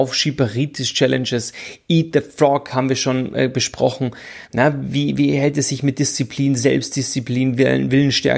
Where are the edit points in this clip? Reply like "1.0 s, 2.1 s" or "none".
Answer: none